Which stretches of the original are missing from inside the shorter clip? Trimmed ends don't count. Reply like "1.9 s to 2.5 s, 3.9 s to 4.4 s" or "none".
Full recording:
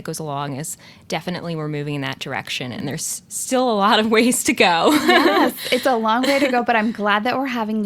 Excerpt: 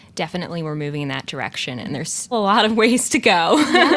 3.2 s to 3.7 s

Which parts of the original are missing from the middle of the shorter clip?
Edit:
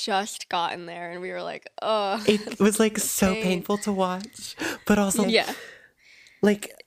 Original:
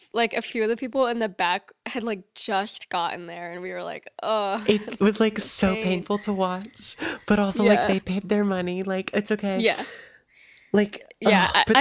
7.6 s to 9.5 s

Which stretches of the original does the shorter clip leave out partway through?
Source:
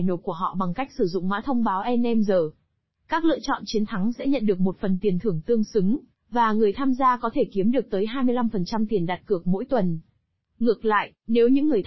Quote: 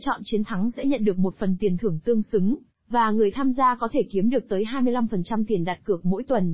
none

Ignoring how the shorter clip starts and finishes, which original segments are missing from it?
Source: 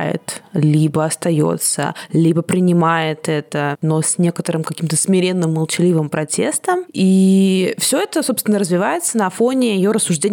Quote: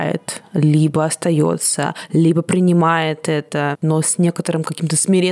none

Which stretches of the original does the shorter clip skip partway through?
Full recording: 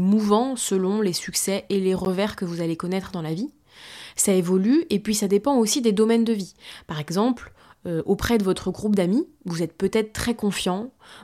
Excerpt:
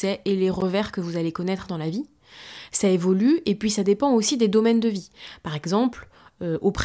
none

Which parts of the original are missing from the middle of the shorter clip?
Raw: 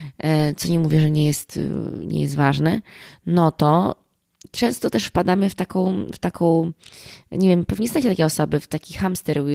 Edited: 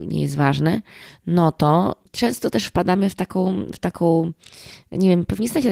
4.1 s to 4.5 s

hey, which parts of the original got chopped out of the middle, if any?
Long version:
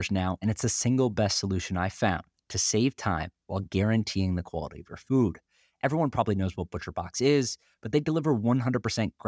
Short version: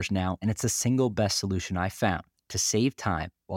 none

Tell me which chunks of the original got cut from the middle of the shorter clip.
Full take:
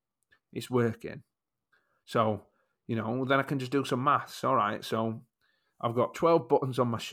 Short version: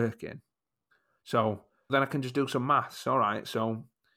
2.7 s to 3.3 s

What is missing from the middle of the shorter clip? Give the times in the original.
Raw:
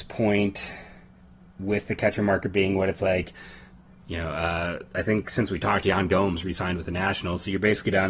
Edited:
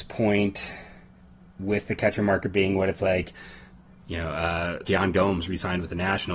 4.9 s to 5.8 s

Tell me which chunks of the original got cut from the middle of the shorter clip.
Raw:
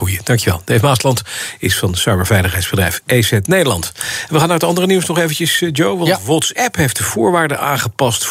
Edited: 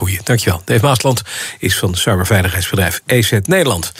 none

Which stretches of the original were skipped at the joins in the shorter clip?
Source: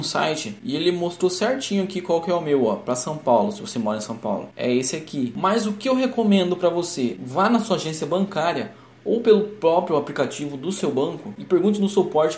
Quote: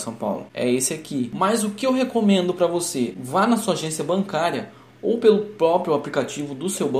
none

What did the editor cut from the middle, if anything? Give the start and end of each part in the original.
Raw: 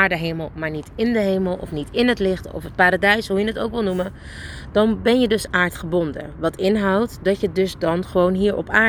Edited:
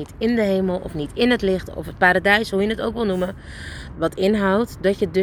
4.7 s to 6.4 s

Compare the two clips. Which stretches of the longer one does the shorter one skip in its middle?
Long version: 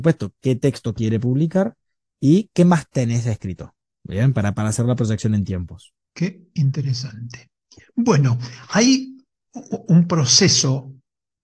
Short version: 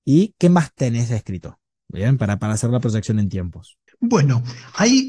6.0 s to 7.8 s

